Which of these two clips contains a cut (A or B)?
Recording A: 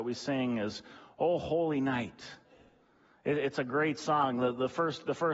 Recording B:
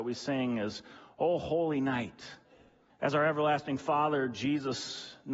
B